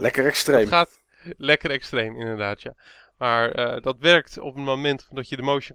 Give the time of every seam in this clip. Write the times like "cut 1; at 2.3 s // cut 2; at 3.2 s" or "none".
none